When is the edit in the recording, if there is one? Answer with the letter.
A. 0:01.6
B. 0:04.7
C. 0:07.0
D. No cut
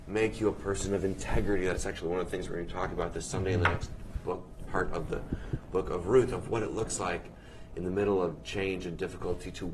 B